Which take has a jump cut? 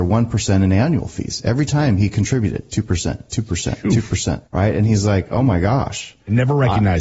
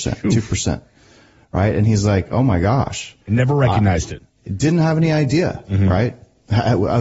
first; 1 cut; at 4.5 s

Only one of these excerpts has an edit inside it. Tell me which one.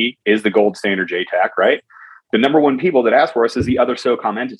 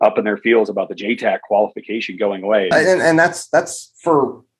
second; 1 cut; at 2.7 s

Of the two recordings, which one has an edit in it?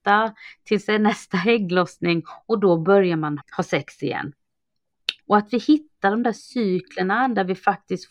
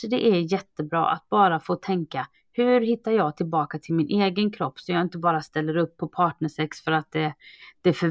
first; 2 cuts; at 3.4 s, 5.2 s

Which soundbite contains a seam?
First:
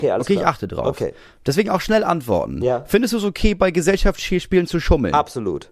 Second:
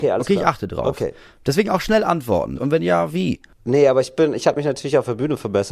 second; 1 cut; at 2.6 s

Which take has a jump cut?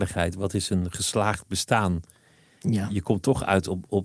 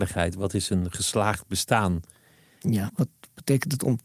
second; 1 cut; at 2.9 s

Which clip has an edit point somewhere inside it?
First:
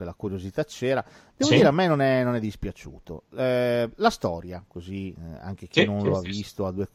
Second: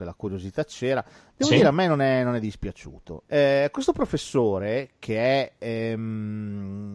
second; 1 cut; at 3.2 s

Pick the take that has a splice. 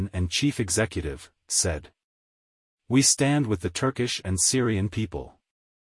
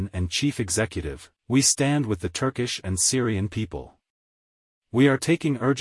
second; 2 cuts; at 1.4 s, 4.7 s

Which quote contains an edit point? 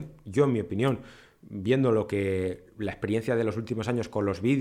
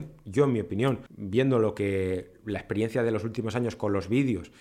second; 1 cut; at 1.1 s

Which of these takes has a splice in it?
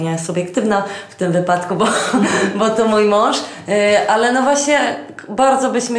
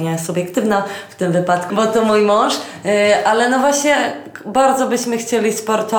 second; 1 cut; at 1.7 s

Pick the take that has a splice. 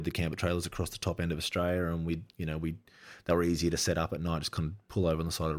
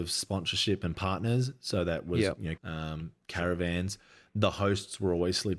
second; 1 cut; at 2.6 s

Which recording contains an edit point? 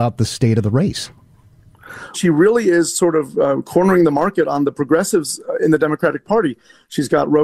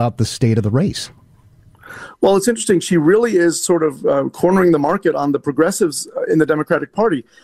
first; 1 cut; at 2.1 s

